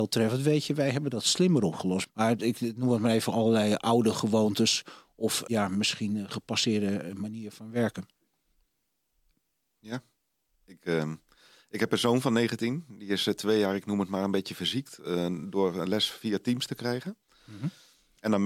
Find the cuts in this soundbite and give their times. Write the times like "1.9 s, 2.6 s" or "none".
2.0 s

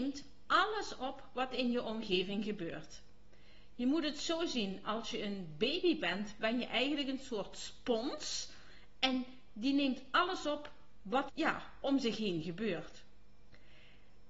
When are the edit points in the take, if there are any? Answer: 11.3 s

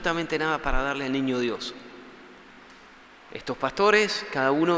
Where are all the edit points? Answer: none

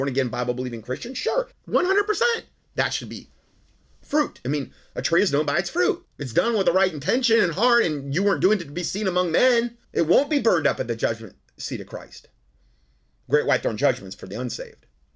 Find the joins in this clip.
1.5 s, 6.0 s, 9.8 s

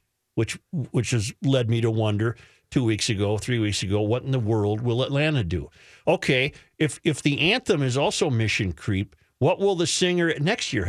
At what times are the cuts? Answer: none

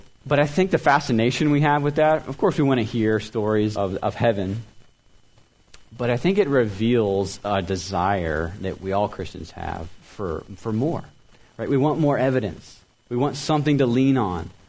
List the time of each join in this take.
3.7 s

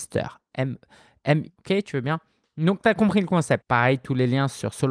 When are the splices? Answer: 1.5 s, 3.6 s

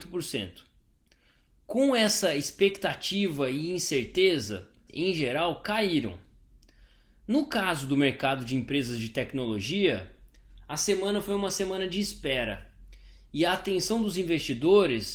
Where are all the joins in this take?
4.9 s

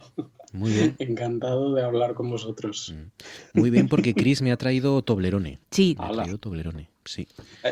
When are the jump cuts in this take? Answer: 5.6 s

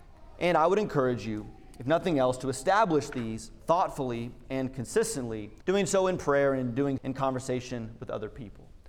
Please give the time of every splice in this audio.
5.6 s, 7.0 s

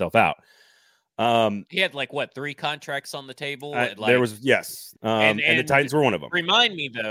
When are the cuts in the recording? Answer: 4.9 s

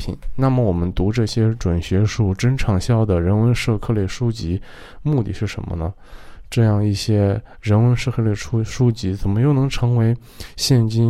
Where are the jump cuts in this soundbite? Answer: none

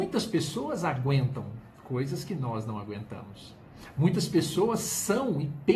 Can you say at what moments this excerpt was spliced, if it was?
none

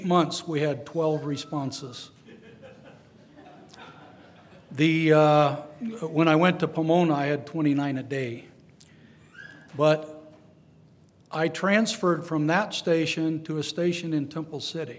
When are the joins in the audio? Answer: none

